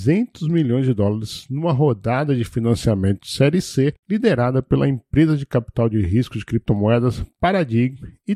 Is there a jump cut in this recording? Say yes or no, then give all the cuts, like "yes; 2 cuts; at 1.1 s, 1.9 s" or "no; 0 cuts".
no; 0 cuts